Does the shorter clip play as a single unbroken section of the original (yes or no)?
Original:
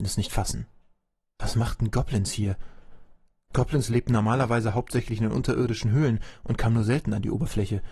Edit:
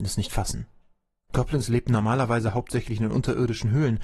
no